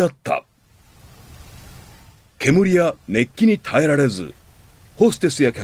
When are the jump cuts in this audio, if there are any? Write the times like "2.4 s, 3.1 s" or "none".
none